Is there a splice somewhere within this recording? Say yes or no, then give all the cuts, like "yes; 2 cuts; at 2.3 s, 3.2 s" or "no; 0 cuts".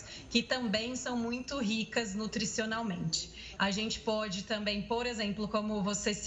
yes; 1 cut; at 3.6 s